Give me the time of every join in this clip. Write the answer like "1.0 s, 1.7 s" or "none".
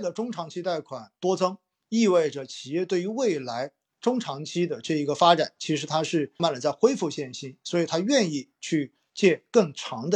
6.4 s